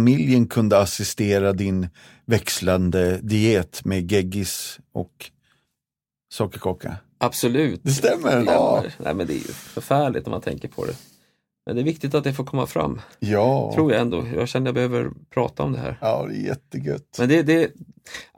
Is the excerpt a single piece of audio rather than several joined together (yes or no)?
no